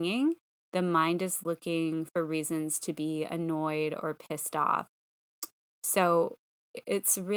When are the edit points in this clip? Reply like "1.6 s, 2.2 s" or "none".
5.6 s